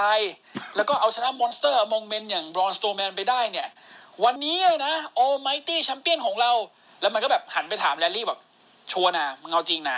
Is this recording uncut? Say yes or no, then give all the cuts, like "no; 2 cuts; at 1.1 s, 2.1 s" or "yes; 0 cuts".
no; 1 cut; at 4.4 s